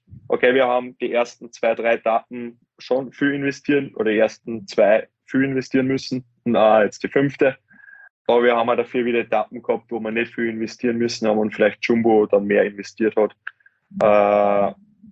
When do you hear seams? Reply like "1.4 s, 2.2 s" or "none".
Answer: none